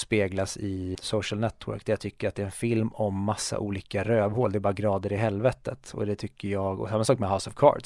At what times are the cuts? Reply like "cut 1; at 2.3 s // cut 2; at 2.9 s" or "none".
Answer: cut 1; at 0.9 s